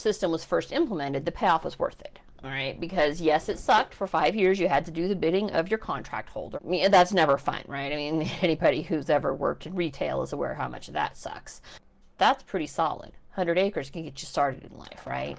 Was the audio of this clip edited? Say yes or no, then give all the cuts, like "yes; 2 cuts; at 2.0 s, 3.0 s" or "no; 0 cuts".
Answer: yes; 3 cuts; at 6.6 s, 8.4 s, 12.1 s